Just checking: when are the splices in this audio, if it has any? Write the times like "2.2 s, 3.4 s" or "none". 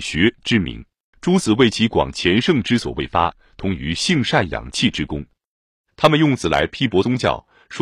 1.1 s